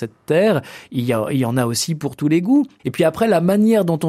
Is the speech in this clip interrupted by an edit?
yes; 1 cut; at 2.8 s

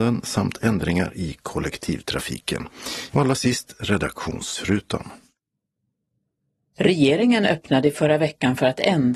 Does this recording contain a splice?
yes; 1 cut; at 6.7 s

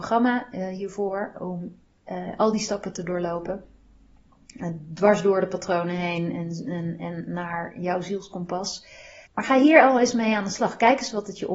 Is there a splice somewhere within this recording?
no; 0 cuts

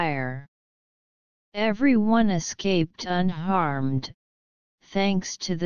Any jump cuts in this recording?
yes; 1 cut; at 1.4 s

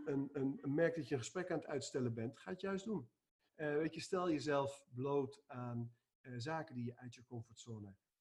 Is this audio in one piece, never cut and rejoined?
no; 1 cut; at 3.5 s

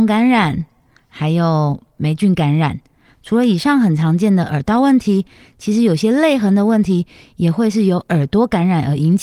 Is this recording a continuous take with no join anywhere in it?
yes; 0 cuts

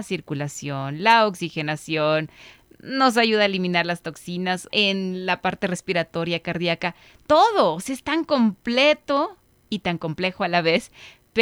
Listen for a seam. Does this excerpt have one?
yes; 1 cut; at 4.7 s

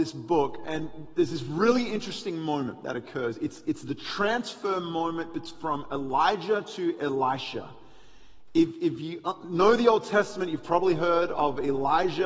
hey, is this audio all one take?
yes; 0 cuts

